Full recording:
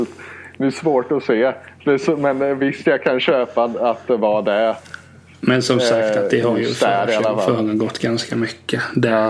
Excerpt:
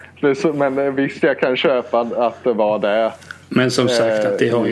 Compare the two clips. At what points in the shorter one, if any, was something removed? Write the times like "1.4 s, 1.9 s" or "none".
3.4 s